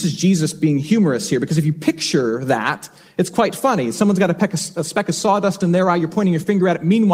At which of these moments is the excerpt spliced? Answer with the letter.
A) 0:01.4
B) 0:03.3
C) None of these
C